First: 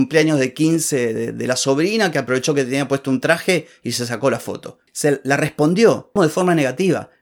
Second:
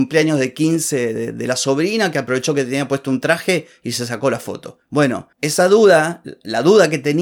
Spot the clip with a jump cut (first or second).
first